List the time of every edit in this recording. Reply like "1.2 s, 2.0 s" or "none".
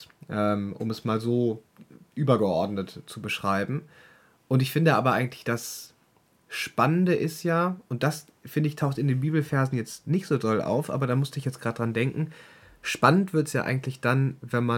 none